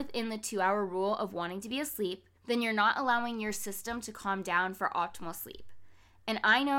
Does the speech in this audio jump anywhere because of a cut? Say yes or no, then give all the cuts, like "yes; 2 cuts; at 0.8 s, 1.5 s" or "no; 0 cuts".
yes; 1 cut; at 2.4 s